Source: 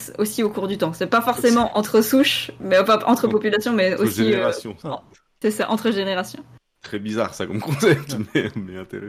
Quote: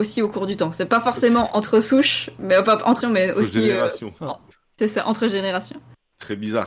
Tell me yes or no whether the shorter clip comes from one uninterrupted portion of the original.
no